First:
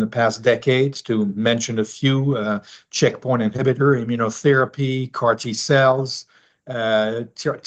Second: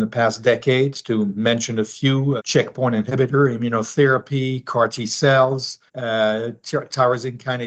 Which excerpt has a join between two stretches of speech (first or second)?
second